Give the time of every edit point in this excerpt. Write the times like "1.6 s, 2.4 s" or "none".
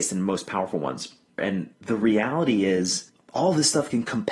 1.4 s